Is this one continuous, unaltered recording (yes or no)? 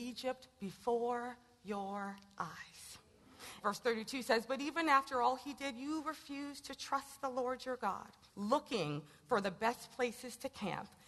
no